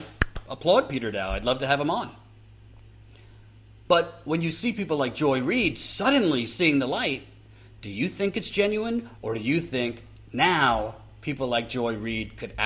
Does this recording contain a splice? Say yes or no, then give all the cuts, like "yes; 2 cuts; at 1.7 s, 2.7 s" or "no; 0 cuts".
no; 0 cuts